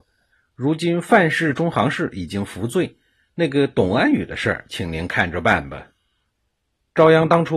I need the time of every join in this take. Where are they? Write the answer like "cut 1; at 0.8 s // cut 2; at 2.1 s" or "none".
none